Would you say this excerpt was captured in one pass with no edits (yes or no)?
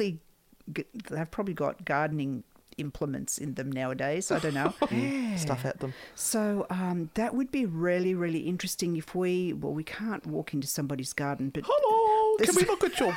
no